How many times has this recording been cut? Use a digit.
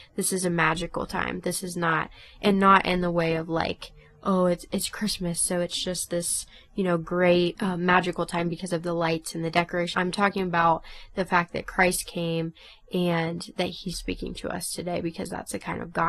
2